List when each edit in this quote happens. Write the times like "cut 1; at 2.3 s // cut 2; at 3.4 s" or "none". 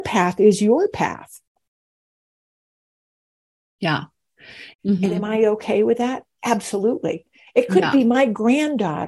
cut 1; at 4.7 s